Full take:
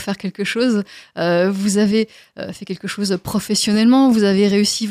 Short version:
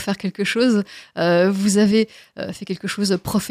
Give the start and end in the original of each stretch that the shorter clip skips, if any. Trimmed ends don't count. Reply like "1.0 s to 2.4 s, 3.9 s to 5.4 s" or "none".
none